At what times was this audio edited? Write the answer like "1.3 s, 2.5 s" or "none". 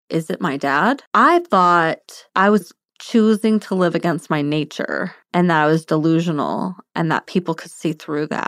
1.1 s, 2.3 s, 5.2 s